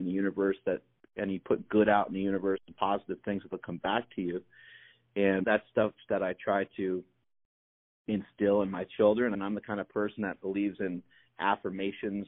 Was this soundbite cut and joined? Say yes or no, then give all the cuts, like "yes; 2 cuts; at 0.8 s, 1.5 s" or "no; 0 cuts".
yes; 2 cuts; at 5.4 s, 9.3 s